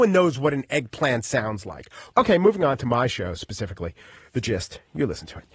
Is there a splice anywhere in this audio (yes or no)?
yes